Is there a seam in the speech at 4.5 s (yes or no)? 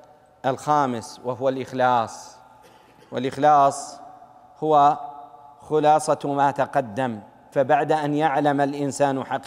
no